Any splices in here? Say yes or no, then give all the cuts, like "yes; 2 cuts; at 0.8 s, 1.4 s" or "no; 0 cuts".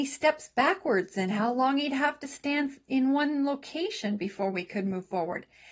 no; 0 cuts